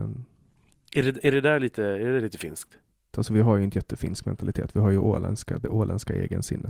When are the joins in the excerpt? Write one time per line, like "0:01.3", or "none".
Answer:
0:03.1